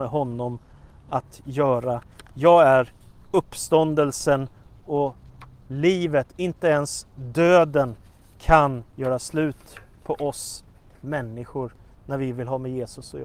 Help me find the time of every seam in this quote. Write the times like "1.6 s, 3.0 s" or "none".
none